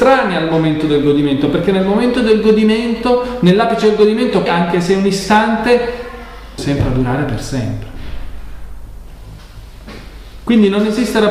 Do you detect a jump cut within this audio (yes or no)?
yes